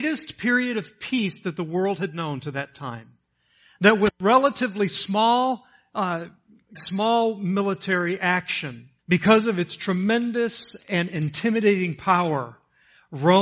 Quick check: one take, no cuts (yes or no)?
no